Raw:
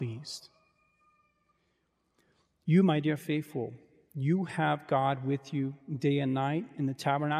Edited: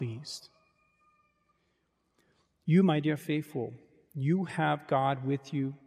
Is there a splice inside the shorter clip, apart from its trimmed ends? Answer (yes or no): no